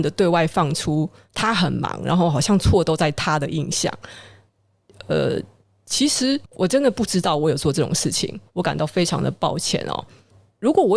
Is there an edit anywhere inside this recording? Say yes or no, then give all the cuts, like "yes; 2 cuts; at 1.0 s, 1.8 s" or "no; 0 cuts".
yes; 2 cuts; at 6.5 s, 8.5 s